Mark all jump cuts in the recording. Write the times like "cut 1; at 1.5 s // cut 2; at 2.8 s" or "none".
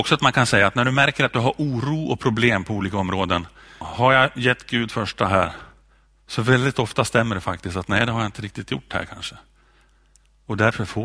cut 1; at 3.8 s